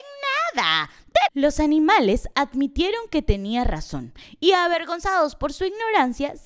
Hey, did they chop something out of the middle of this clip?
yes; 1 cut; at 1.3 s

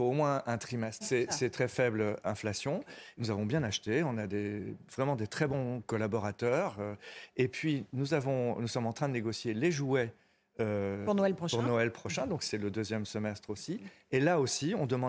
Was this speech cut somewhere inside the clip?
yes; 1 cut; at 1.0 s

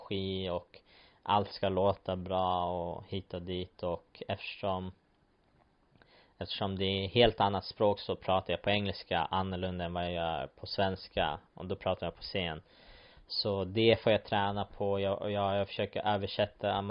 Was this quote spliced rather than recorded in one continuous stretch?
no; 0 cuts

